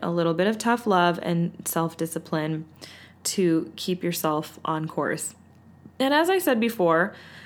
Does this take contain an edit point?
yes; 1 cut; at 5.9 s

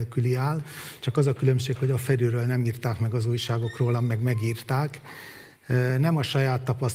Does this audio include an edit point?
no; 0 cuts

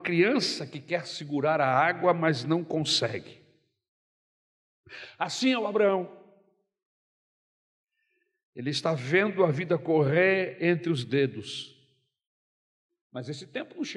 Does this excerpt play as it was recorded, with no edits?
no; 1 cut; at 13.0 s

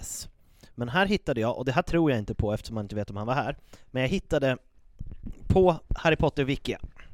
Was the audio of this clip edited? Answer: no; 0 cuts

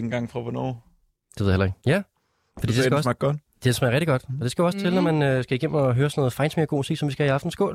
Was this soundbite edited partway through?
yes; 1 cut; at 1.8 s

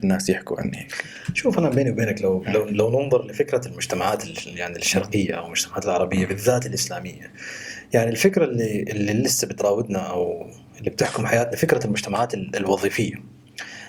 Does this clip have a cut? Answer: no; 0 cuts

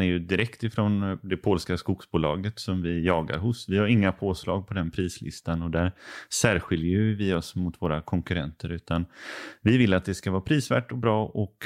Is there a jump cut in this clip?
no; 0 cuts

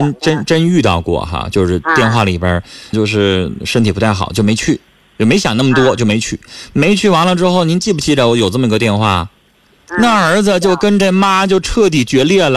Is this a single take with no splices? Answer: no; 1 cut; at 2.9 s

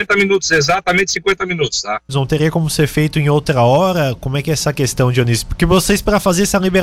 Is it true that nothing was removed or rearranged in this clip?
no; 1 cut; at 2.1 s

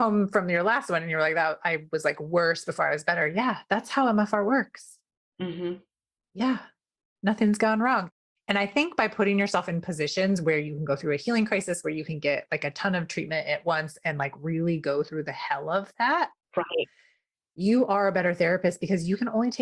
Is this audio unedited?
yes; 0 cuts

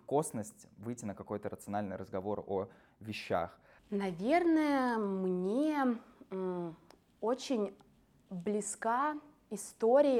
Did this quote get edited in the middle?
yes; 1 cut; at 3.8 s

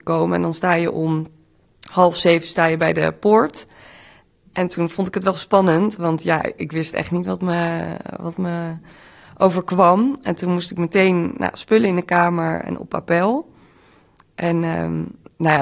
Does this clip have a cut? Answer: no; 0 cuts

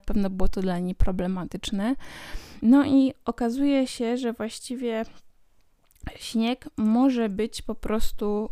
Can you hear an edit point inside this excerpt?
yes; 1 cut; at 2.6 s

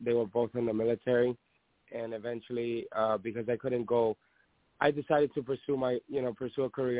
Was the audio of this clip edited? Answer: yes; 1 cut; at 1.8 s

